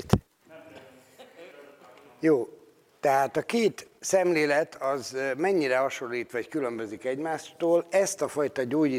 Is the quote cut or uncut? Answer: uncut